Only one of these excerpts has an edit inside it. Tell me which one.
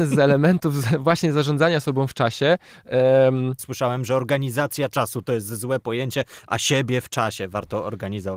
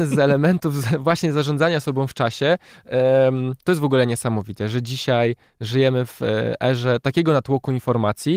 first; 1 cut; at 3.6 s

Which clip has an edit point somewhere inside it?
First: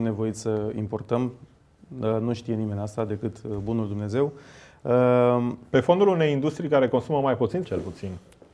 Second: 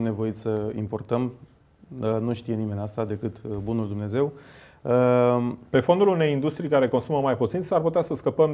first; 1 cut; at 7.6 s

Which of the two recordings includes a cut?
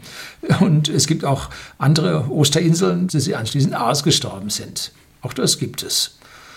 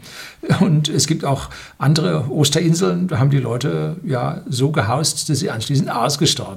first; 1 cut; at 3.1 s

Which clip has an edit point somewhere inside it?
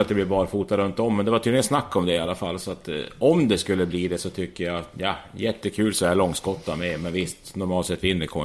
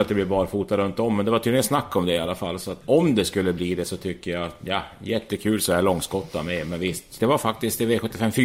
second; 2 cuts; at 2.8 s, 7.2 s

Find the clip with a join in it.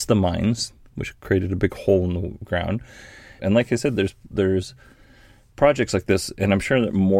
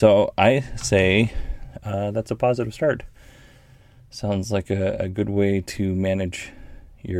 first; 1 cut; at 3.4 s

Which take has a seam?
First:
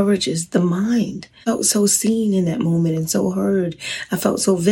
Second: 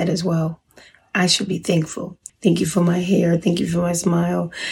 second; 1 cut; at 2.3 s

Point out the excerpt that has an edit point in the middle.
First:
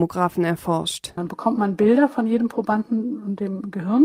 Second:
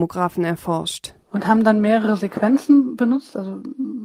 first; 1 cut; at 1.2 s

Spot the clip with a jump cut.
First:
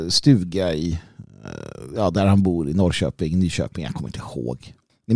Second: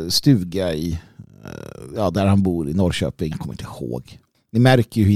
second; 1 cut; at 3.3 s

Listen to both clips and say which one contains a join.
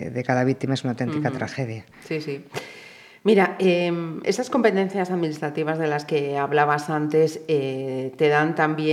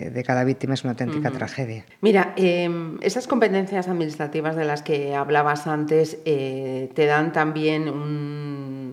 second; 1 cut; at 1.9 s

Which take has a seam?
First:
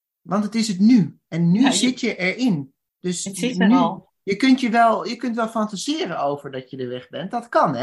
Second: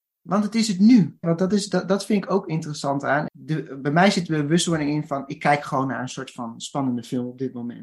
second; 2 cuts; at 1.2 s, 3.3 s

